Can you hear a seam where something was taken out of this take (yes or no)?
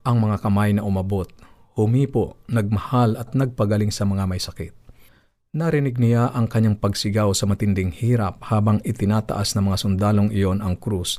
no